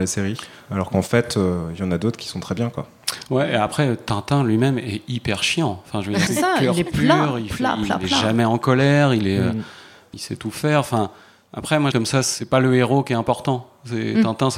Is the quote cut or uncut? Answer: cut